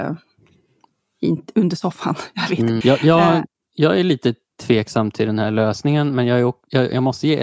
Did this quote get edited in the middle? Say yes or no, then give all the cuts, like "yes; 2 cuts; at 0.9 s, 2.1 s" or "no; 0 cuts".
yes; 1 cut; at 2.8 s